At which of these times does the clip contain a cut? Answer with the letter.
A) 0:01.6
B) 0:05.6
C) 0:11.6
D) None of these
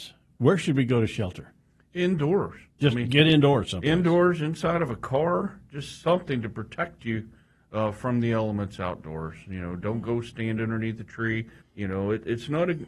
C